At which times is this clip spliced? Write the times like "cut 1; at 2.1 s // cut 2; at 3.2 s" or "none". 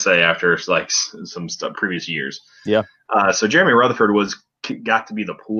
cut 1; at 1.7 s